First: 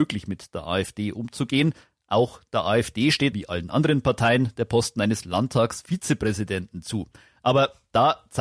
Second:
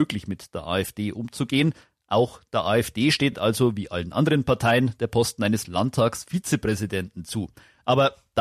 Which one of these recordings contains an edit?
first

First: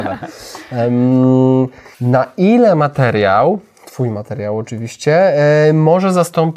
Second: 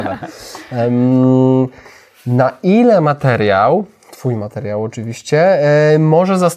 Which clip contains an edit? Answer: first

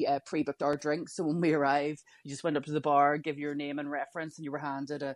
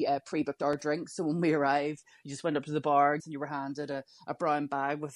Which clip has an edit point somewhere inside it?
second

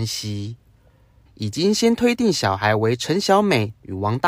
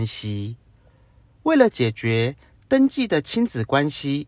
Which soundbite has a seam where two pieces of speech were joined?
first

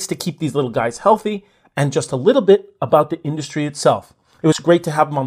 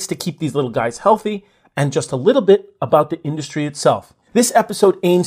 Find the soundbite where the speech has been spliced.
second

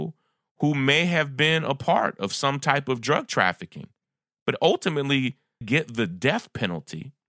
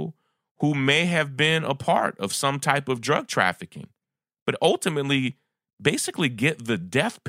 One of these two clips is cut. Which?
first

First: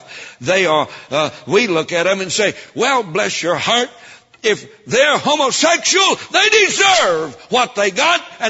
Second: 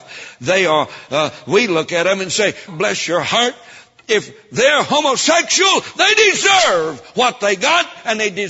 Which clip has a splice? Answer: second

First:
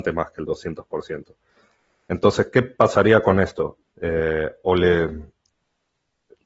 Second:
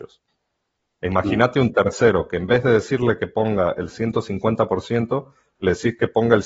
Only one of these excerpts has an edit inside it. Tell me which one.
first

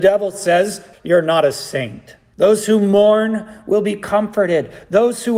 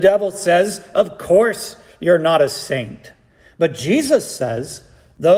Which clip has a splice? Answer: first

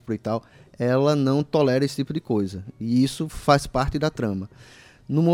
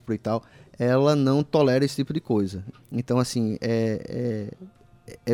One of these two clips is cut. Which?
second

